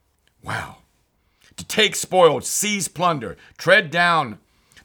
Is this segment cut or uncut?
uncut